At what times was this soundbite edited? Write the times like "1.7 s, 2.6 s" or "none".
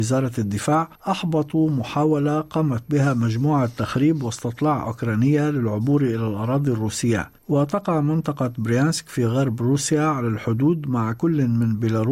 1.0 s, 7.4 s